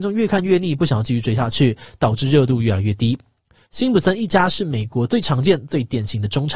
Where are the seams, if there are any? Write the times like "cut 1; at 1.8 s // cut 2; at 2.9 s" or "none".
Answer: cut 1; at 3.7 s